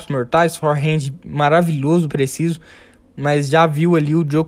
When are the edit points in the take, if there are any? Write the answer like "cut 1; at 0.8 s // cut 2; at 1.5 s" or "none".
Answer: cut 1; at 2.1 s